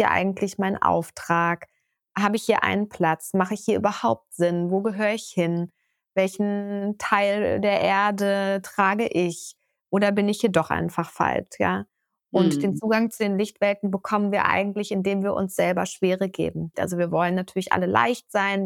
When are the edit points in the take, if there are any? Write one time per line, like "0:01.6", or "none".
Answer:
0:16.7